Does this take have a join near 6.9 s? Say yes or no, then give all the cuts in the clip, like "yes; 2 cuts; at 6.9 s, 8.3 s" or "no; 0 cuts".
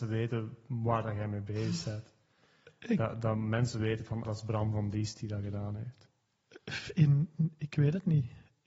no; 1 cut; at 4.2 s